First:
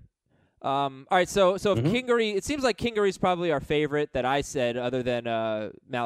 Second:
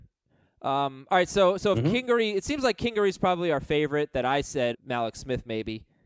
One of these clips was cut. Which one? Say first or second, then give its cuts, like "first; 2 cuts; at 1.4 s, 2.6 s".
second; 1 cut; at 4.7 s